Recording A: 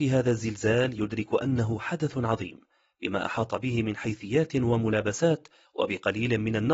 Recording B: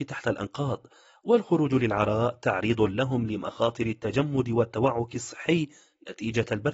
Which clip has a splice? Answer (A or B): A